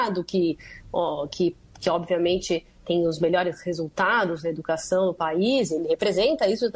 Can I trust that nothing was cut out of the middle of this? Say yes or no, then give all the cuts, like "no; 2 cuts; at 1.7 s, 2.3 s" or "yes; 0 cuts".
yes; 0 cuts